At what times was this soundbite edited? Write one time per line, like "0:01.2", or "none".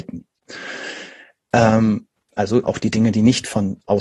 0:02.6